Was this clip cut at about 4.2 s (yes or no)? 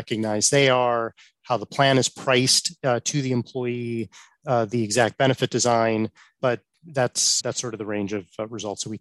no